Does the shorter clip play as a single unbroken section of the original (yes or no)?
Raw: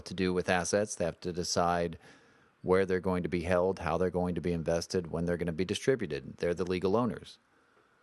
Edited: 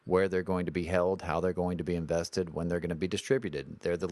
yes